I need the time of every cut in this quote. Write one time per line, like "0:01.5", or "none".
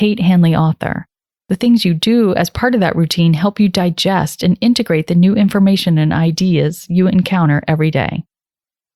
0:01.4